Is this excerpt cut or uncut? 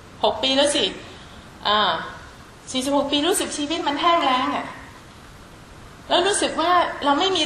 uncut